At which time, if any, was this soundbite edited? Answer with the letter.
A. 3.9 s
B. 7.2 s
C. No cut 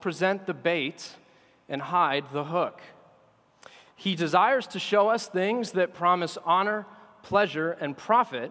C